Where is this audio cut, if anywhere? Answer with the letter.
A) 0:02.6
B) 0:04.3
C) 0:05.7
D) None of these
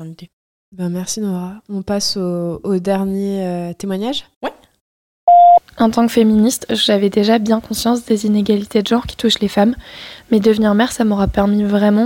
D